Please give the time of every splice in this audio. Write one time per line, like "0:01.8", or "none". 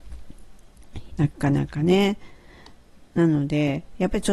0:01.1